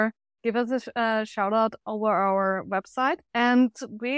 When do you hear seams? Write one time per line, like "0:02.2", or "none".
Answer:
0:03.3

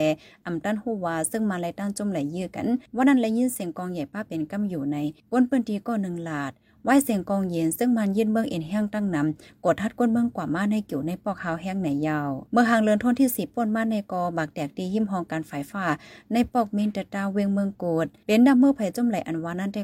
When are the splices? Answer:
0:15.7

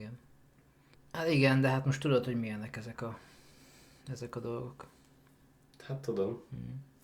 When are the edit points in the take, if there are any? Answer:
0:00.9

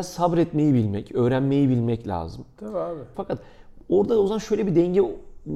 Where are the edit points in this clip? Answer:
0:03.1

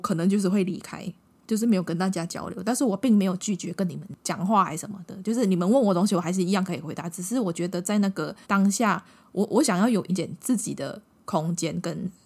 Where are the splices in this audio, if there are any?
0:08.4
0:10.1

